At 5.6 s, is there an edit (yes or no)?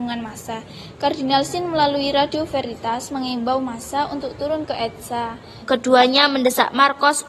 yes